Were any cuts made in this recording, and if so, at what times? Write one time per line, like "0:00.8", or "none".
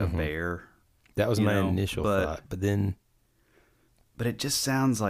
none